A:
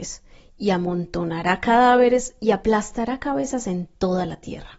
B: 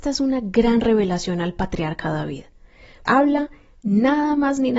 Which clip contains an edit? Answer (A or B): B